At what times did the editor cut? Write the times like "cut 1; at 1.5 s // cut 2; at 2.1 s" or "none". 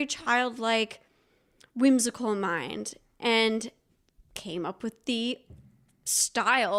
none

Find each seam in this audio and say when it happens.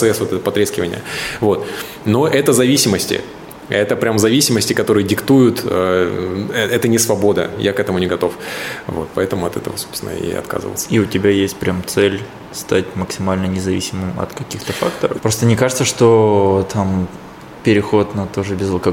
cut 1; at 15.2 s

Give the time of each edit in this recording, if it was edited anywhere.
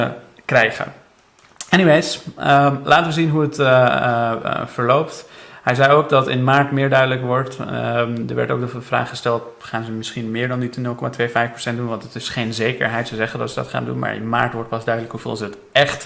none

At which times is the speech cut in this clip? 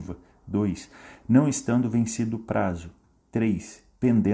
none

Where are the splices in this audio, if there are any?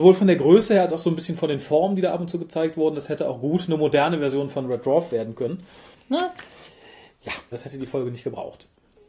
cut 1; at 5.9 s // cut 2; at 7.5 s

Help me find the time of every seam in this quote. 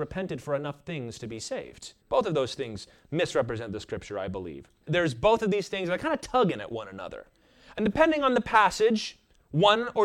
cut 1; at 2.0 s // cut 2; at 4.9 s

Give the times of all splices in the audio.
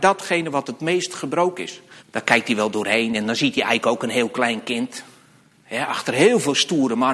cut 1; at 2.0 s

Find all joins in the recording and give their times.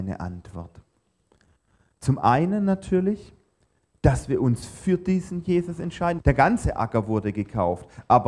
cut 1; at 6.2 s

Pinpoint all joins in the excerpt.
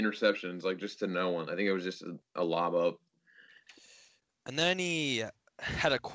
none

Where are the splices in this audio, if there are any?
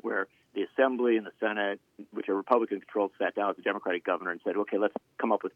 none

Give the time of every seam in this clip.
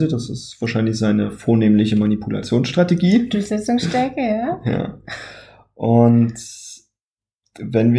none

